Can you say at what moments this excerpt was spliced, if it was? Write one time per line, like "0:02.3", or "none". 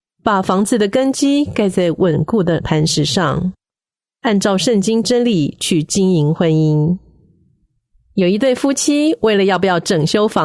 none

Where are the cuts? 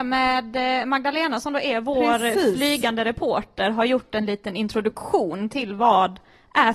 none

